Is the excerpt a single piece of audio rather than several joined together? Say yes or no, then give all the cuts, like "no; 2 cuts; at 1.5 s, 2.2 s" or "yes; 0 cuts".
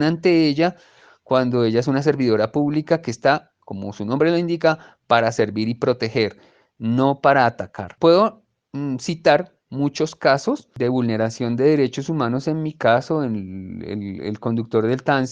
yes; 0 cuts